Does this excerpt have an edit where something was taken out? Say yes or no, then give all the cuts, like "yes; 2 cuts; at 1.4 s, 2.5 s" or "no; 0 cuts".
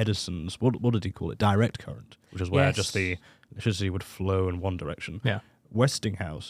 no; 0 cuts